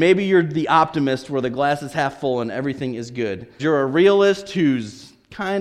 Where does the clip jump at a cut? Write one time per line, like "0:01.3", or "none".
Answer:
0:03.6